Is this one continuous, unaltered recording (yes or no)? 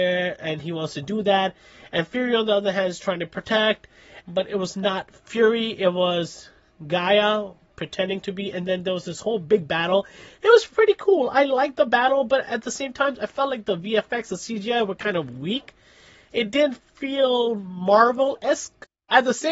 no